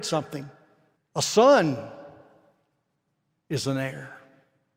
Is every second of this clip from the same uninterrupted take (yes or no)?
no